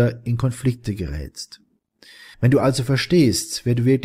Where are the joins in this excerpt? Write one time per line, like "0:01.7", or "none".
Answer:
0:02.3